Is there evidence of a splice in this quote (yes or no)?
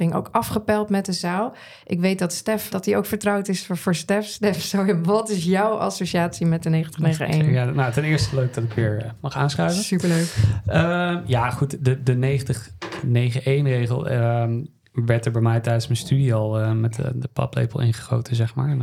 yes